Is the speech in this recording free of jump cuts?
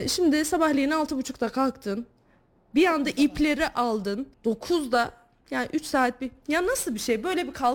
no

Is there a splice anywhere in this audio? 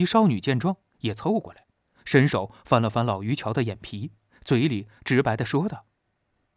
yes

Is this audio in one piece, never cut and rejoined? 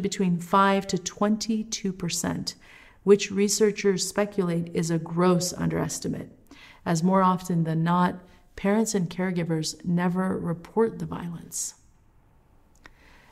yes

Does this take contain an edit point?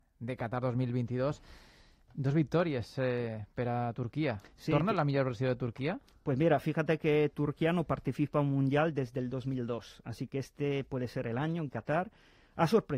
no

